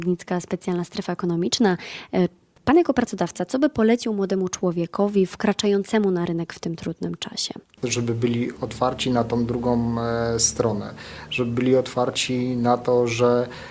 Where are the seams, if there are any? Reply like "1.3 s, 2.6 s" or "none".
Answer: 8.6 s